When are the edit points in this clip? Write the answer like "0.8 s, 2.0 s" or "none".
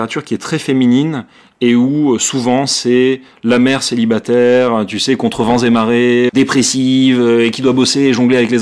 6.3 s